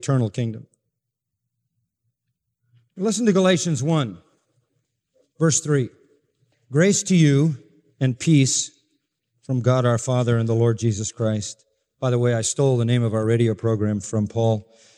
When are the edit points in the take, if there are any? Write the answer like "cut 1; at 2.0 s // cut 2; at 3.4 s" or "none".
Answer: none